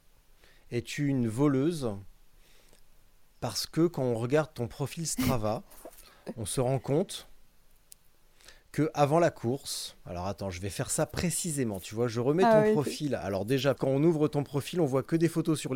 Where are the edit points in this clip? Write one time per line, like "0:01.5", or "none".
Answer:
0:13.8